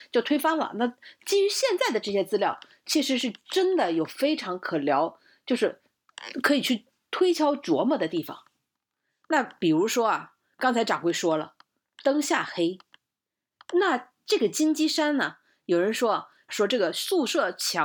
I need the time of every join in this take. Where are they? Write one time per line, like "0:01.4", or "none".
0:16.5